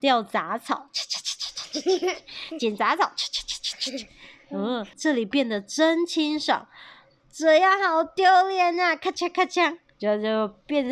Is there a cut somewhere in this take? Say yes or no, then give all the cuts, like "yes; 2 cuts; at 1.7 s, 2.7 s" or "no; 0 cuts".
yes; 2 cuts; at 4.9 s, 7.2 s